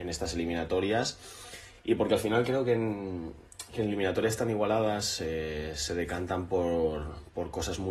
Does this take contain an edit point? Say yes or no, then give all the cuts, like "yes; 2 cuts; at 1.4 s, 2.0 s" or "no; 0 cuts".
no; 0 cuts